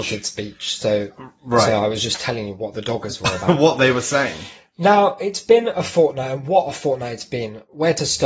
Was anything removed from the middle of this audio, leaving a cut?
no; 0 cuts

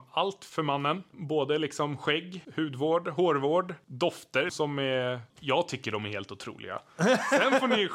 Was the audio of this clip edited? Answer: no; 0 cuts

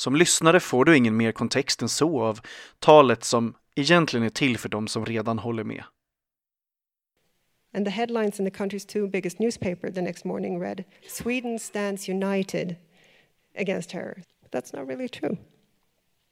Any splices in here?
yes; 1 cut; at 14.2 s

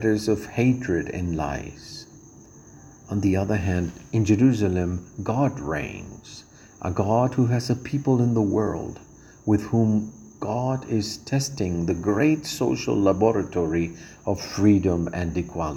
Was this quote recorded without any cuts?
yes; 0 cuts

